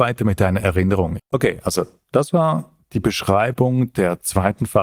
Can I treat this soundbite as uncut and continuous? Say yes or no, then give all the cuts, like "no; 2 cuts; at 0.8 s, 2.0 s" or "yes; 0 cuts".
no; 1 cut; at 1.2 s